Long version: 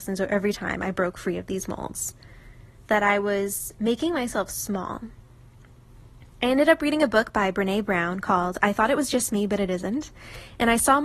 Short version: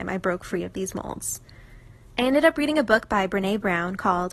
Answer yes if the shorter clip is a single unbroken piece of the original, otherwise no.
no